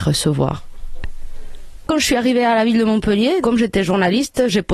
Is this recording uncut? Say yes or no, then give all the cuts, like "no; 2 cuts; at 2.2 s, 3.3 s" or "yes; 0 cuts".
no; 1 cut; at 3.4 s